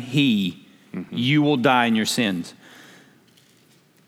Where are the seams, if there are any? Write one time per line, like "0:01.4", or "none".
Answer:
none